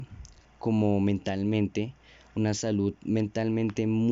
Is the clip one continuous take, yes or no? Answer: yes